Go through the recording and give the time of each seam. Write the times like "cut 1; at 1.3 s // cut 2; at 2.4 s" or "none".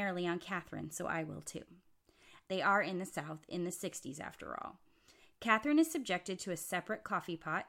cut 1; at 2.4 s